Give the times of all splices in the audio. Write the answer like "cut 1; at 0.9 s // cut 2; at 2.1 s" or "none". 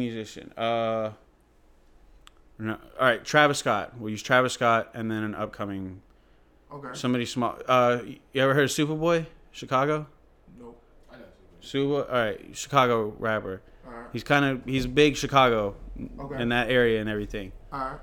none